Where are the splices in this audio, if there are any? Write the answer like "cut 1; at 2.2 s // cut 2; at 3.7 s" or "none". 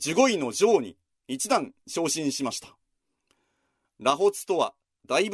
cut 1; at 3.8 s